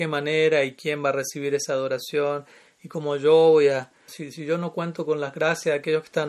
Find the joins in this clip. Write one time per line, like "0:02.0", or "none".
0:04.1